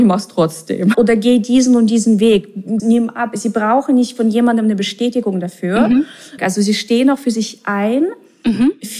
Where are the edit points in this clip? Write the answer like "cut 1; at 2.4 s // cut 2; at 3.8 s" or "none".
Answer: cut 1; at 0.9 s // cut 2; at 2.8 s // cut 3; at 6.4 s